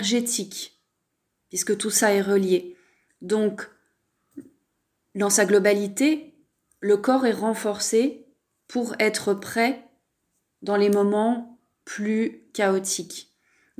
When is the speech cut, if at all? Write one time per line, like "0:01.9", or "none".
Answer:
none